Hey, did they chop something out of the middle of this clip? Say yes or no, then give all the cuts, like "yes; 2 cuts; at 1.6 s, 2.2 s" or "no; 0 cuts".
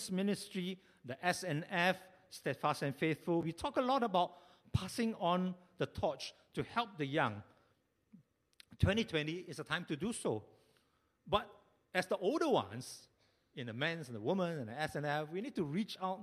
no; 0 cuts